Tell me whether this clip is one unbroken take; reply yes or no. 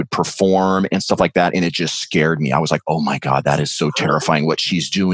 yes